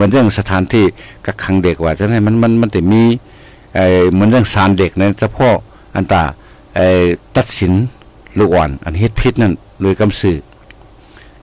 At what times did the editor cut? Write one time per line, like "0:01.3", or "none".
none